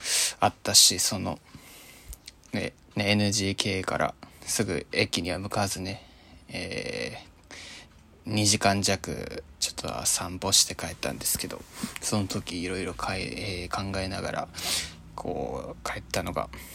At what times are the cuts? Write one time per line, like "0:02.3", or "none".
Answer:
0:02.9